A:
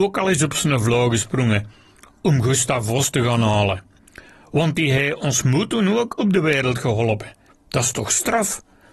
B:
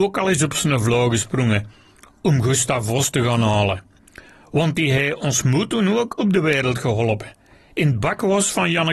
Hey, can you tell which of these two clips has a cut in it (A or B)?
A